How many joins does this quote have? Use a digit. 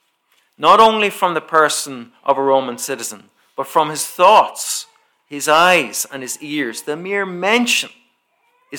0